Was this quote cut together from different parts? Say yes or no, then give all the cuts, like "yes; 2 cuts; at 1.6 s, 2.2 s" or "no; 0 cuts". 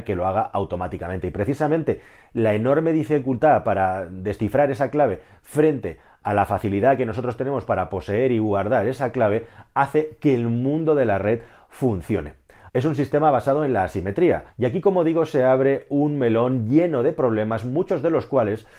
yes; 2 cuts; at 12.7 s, 14.5 s